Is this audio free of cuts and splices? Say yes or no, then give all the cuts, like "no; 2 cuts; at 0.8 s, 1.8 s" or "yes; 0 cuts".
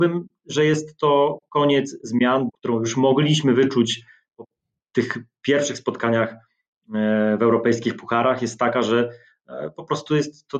no; 1 cut; at 2.5 s